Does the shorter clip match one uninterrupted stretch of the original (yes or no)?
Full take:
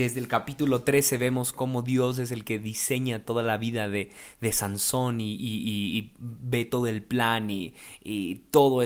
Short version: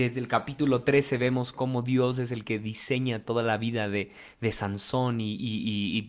yes